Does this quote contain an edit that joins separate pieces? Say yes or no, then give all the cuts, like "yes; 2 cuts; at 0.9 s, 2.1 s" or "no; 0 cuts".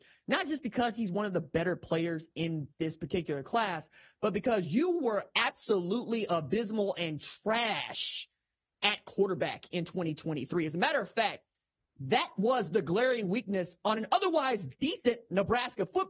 no; 0 cuts